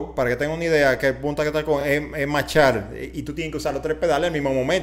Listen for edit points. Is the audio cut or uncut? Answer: uncut